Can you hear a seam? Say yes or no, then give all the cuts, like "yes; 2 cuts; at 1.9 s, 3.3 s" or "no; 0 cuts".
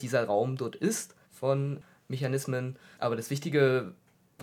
yes; 1 cut; at 1.2 s